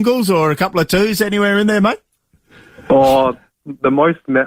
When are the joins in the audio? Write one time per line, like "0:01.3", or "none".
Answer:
none